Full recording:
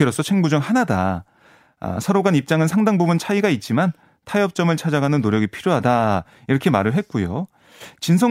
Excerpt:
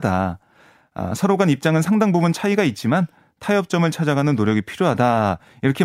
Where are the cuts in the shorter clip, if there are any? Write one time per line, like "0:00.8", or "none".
none